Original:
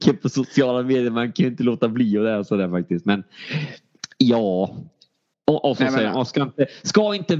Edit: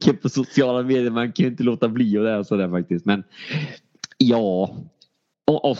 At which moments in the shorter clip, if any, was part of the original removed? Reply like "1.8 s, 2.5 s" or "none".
none